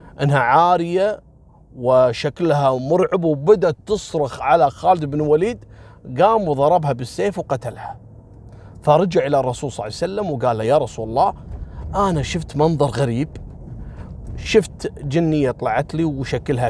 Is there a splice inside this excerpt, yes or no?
no